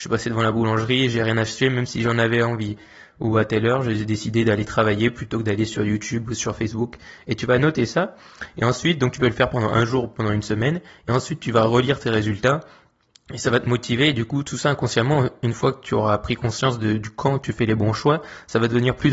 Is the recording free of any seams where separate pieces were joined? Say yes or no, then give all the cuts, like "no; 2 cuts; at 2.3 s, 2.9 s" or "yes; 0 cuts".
yes; 0 cuts